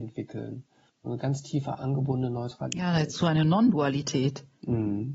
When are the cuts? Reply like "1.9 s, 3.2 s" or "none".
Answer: none